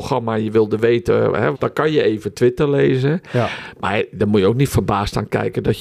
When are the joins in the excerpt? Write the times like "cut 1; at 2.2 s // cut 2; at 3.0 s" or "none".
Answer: cut 1; at 1.5 s